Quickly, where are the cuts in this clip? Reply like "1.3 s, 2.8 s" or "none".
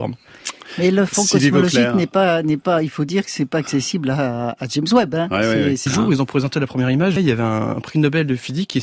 5.9 s, 7.2 s